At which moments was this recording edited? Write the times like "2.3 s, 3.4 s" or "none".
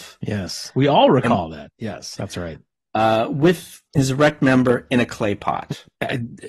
2.2 s, 3.9 s